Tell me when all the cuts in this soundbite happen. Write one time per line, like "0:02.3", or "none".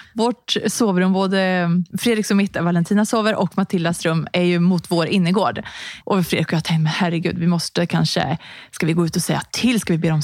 0:01.9
0:06.0